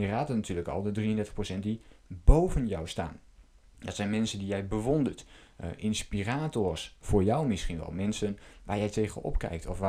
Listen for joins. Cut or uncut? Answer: uncut